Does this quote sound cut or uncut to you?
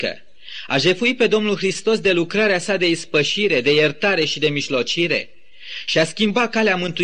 uncut